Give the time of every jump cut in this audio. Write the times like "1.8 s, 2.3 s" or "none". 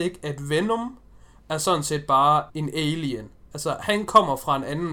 2.5 s